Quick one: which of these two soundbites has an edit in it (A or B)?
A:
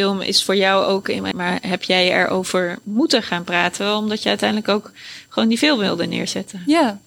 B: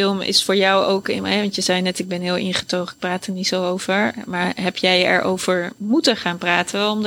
A